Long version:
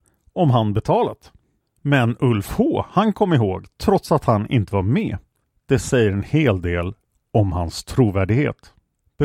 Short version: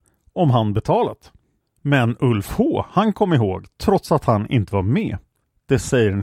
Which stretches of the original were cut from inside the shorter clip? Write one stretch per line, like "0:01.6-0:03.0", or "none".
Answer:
none